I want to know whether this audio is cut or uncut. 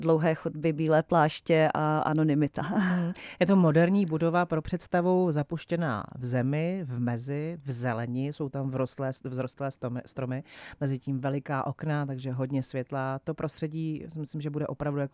uncut